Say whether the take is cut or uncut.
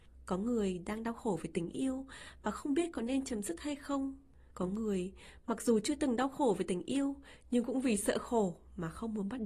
cut